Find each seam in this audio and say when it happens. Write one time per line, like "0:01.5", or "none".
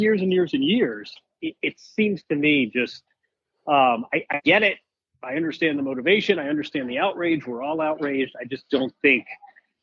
none